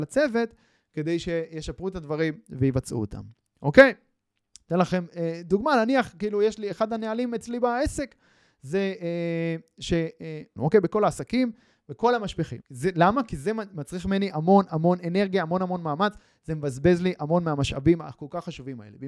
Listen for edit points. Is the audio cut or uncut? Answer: cut